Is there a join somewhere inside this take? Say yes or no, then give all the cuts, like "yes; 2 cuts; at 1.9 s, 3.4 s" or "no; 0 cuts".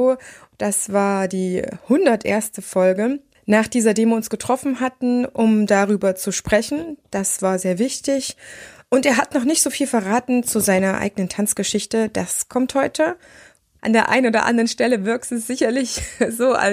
yes; 2 cuts; at 3.3 s, 13.8 s